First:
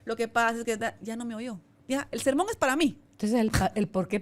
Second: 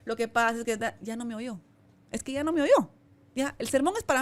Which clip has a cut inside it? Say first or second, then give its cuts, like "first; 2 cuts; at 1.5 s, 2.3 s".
first; 1 cut; at 1.8 s